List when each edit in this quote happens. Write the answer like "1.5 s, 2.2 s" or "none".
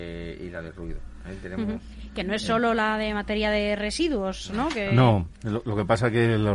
none

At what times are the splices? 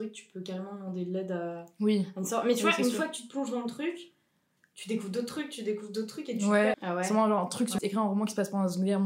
6.7 s, 7.8 s

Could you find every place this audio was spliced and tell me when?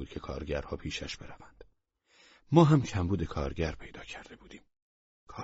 none

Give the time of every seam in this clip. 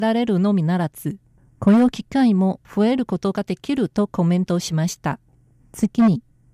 none

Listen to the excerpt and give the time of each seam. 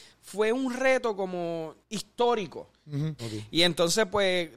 1.8 s, 3.2 s

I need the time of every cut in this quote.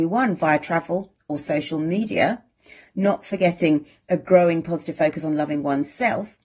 none

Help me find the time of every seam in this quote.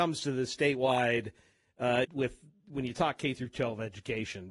2.0 s

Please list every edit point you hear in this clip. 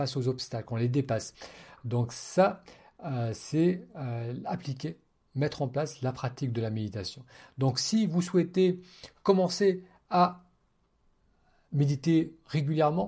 none

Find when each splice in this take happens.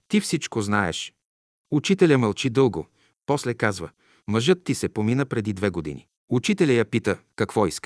3.1 s, 6.2 s

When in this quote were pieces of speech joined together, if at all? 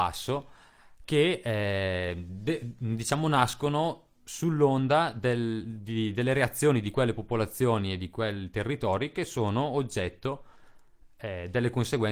none

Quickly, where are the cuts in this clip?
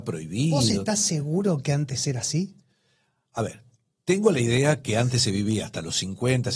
none

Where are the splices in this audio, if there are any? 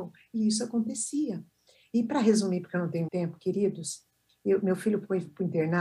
3.1 s

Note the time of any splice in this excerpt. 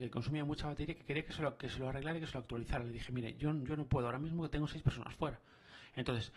none

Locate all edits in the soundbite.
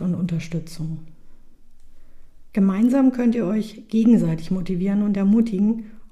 2.5 s

